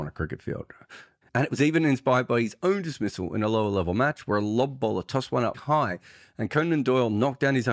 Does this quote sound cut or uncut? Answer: cut